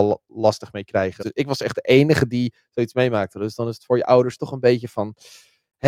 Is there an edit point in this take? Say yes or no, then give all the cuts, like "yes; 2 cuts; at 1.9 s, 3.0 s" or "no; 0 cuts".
yes; 1 cut; at 1.2 s